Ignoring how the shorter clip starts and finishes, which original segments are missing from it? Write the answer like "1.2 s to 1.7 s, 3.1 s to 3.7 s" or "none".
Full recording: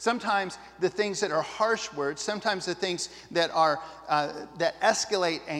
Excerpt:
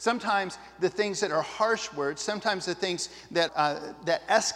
3.5 s to 4.0 s